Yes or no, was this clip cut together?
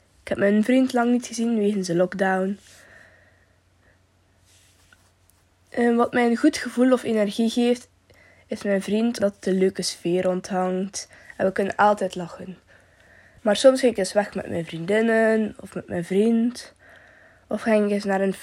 yes